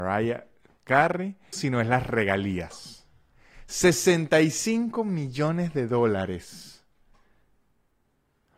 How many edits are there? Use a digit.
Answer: 1